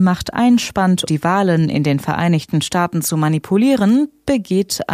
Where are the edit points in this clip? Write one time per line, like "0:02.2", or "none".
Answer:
0:01.1